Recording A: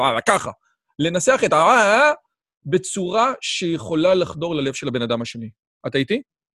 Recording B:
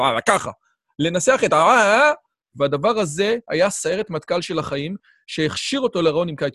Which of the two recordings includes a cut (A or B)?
B